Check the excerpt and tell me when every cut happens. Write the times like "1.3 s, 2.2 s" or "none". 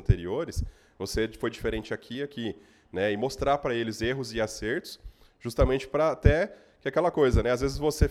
2.1 s